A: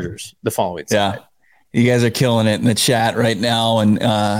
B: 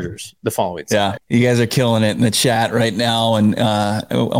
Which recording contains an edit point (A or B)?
B